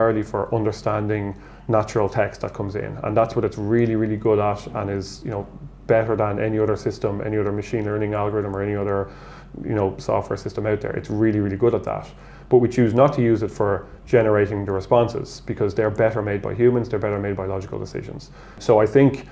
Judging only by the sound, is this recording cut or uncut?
uncut